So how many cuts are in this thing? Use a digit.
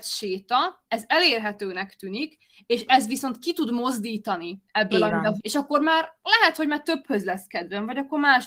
1